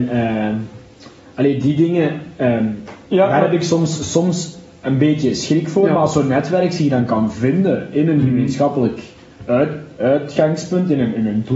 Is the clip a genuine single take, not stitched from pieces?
yes; 0 cuts

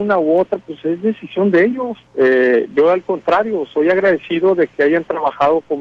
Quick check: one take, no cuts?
no; 1 cut; at 2.1 s

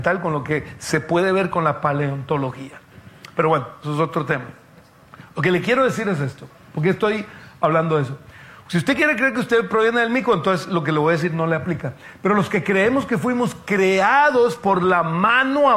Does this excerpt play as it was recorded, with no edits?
yes; 0 cuts

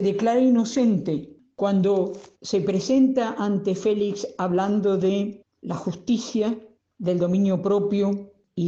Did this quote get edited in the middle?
yes; 1 cut; at 2.3 s

